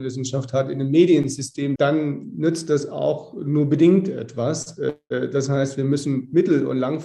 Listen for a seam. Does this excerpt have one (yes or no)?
yes